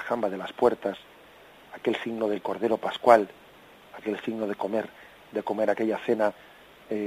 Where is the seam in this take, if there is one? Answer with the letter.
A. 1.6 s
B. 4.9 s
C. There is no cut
C